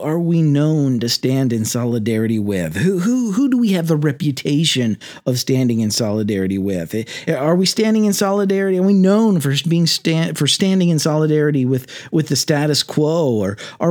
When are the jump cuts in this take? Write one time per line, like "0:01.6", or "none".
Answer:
none